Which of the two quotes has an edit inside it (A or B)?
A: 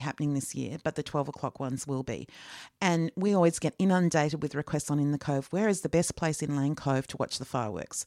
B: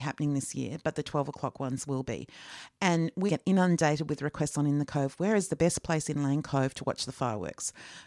B